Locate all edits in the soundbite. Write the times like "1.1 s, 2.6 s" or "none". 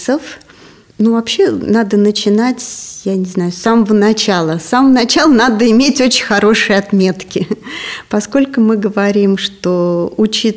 none

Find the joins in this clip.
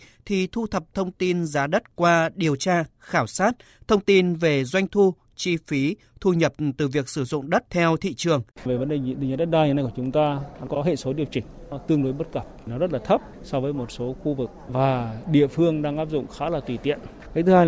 8.5 s

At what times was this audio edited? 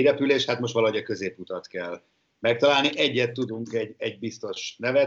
none

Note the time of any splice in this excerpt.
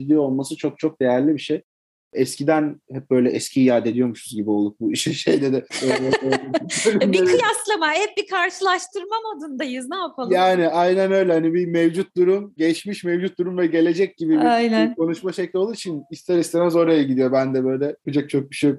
none

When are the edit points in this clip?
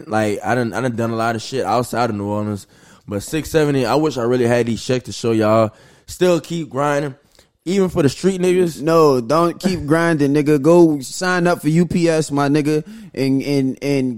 none

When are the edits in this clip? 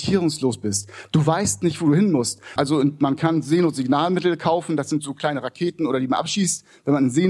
2.6 s

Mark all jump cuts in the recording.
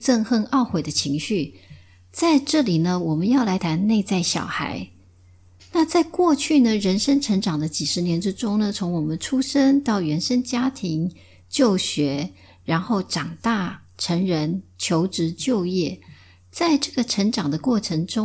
3.6 s, 5.6 s

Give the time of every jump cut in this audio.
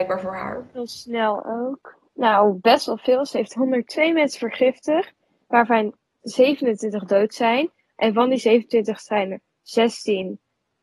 2.1 s

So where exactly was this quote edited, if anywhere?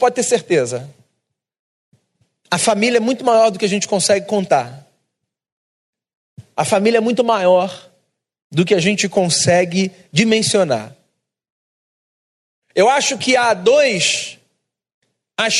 none

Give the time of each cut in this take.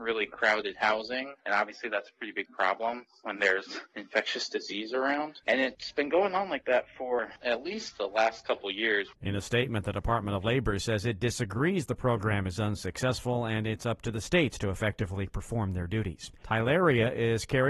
5.4 s, 16.4 s

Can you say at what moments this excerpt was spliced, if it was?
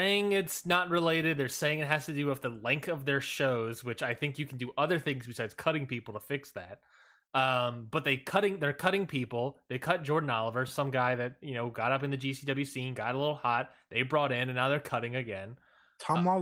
none

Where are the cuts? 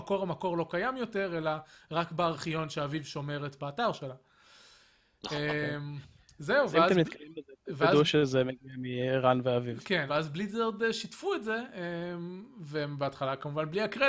10.1 s

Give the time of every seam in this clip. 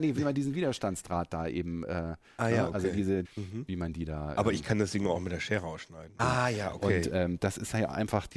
3.2 s, 6.2 s

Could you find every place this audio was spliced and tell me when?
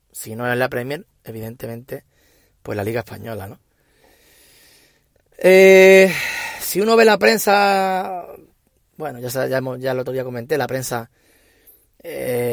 none

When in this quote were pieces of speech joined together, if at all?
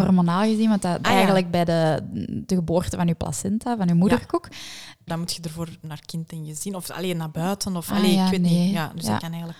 1.0 s, 5.1 s

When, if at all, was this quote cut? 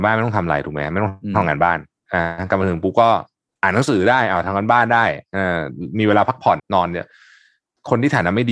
6.6 s

